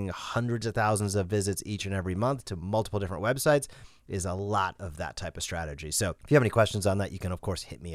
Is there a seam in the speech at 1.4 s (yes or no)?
no